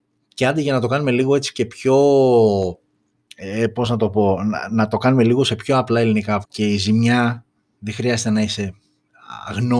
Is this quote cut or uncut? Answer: cut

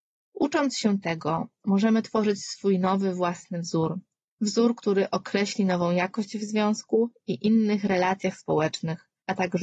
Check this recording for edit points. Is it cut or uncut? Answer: uncut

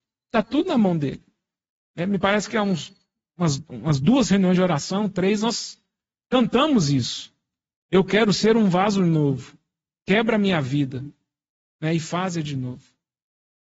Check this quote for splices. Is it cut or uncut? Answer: uncut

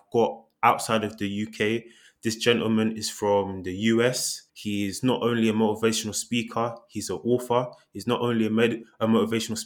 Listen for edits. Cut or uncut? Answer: cut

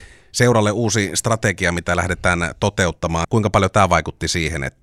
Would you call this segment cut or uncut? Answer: cut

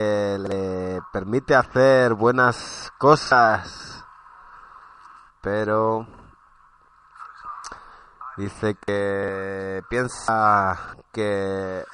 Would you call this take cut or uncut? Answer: cut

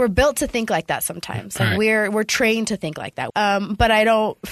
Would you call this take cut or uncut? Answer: cut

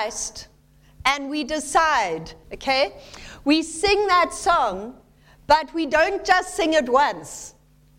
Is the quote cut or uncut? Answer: cut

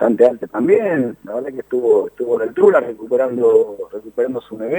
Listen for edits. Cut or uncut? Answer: uncut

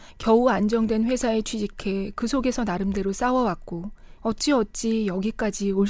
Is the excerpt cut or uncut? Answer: cut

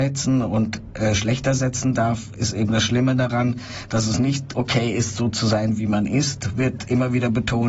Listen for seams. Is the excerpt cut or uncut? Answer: uncut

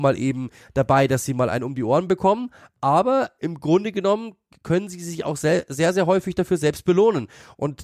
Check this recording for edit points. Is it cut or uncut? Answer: uncut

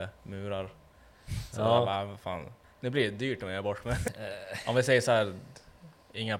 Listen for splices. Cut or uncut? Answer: cut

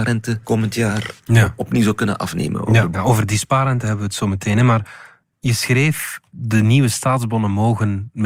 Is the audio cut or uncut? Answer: cut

